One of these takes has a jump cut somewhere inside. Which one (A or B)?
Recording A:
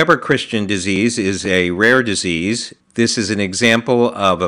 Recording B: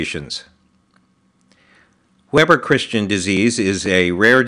A